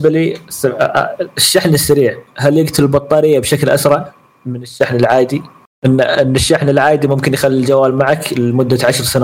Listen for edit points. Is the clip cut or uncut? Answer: uncut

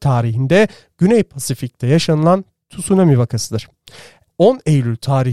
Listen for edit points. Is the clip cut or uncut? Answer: cut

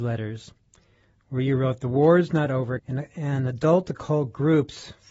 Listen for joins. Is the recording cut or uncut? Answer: cut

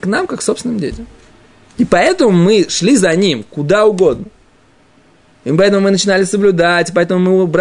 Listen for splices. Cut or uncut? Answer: uncut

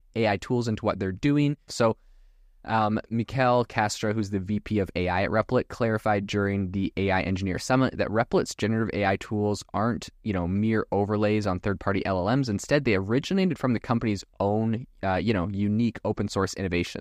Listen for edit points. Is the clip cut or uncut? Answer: cut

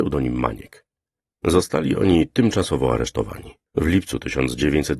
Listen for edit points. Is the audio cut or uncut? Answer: cut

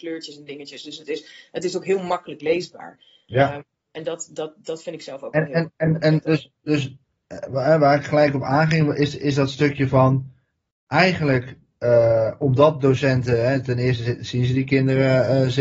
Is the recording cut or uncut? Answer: uncut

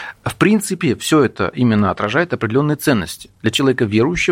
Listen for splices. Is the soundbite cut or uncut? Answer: uncut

